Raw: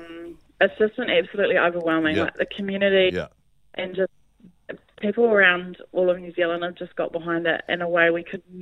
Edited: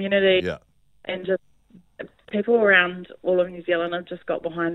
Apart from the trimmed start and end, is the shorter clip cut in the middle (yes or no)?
no